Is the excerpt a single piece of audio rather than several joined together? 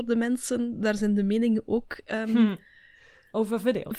yes; 0 cuts

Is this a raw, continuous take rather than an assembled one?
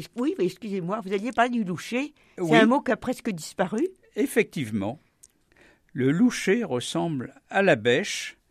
yes; 0 cuts

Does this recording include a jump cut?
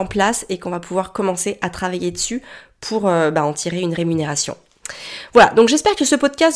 no; 0 cuts

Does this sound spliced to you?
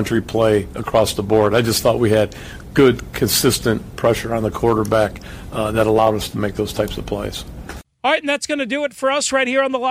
no; 0 cuts

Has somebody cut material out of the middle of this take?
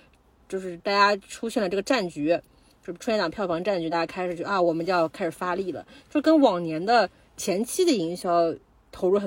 no; 0 cuts

